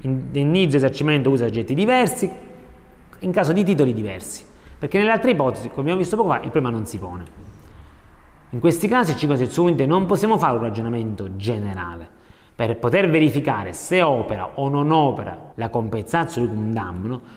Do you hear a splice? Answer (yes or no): yes